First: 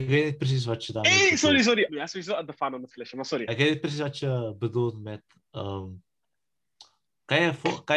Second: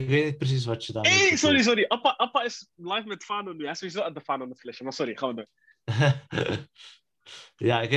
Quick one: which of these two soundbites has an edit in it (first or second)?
first